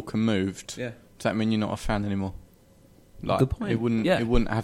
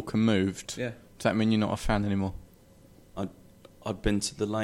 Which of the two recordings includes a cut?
second; 1 cut; at 3.2 s

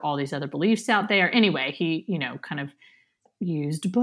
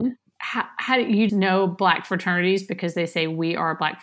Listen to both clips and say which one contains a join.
second; 1 cut; at 1.3 s

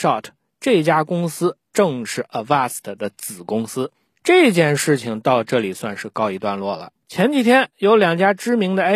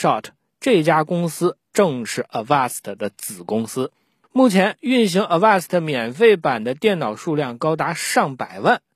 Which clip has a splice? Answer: first; 2 cuts; at 4.1 s, 7.0 s

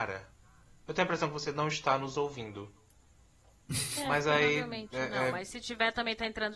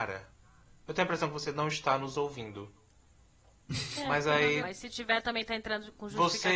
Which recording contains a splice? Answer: second; 1 cut; at 4.6 s

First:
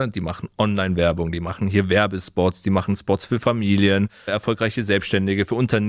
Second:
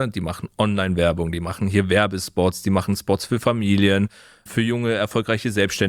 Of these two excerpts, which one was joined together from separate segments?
first; 1 cut; at 4.3 s

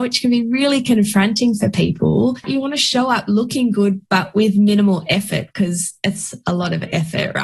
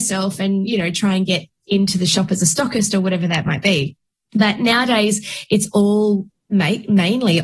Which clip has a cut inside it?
first; 1 cut; at 2.4 s

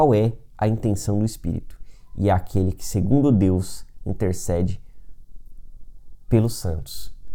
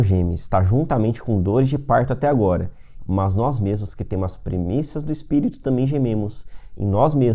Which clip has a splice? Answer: second; 1 cut; at 3.0 s

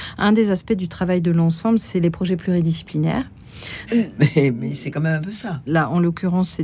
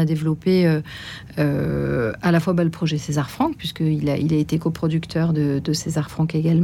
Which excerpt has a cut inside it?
first; 2 cuts; at 3.9 s, 5.7 s

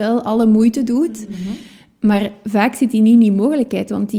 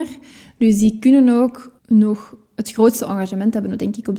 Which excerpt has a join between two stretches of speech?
second; 1 cut; at 1.8 s

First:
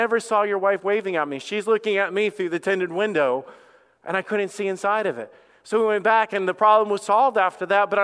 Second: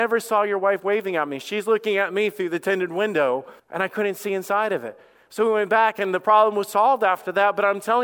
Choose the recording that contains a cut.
second; 1 cut; at 3.6 s

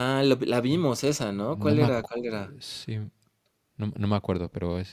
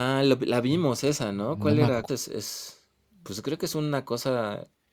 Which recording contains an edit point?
second; 1 cut; at 2.1 s

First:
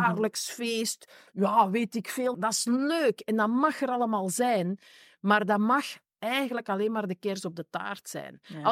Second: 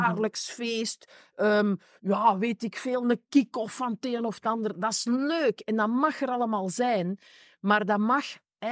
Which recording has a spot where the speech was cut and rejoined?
first; 2 cuts; at 1.3 s, 2.3 s

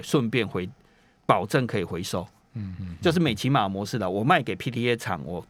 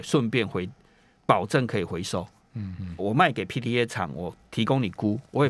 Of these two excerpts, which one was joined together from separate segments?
second; 1 cut; at 3.0 s

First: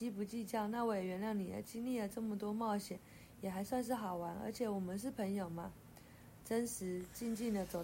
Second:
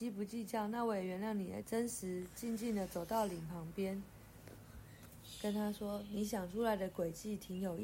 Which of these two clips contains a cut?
second; 1 cut; at 1.6 s

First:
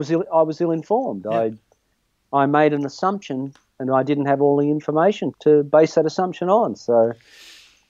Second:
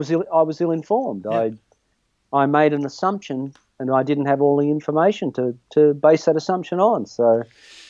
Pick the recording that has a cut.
first; 1 cut; at 5.3 s

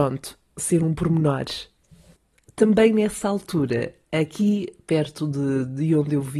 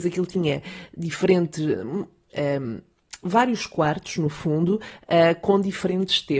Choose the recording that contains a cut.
second; 1 cut; at 2.3 s

